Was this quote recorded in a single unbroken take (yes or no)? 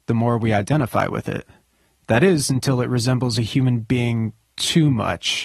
yes